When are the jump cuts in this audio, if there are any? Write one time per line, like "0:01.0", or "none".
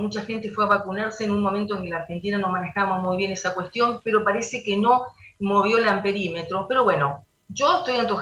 none